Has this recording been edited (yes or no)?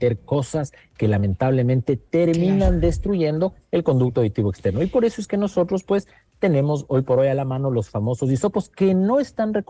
no